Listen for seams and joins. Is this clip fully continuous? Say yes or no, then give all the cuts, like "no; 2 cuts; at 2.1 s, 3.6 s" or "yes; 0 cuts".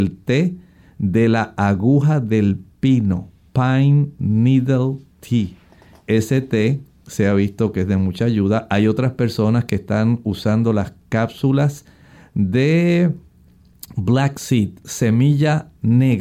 yes; 0 cuts